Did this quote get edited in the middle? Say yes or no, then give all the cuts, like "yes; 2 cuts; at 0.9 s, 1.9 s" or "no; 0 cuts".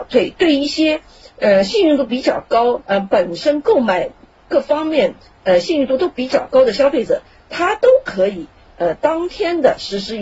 no; 0 cuts